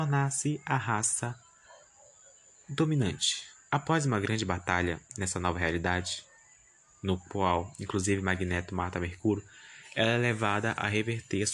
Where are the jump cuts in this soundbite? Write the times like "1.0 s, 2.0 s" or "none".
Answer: none